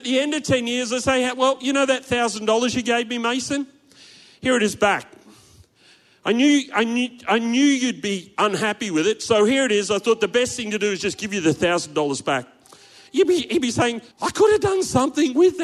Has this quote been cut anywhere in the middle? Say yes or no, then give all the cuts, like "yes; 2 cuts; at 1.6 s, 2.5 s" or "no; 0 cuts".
yes; 1 cut; at 14.1 s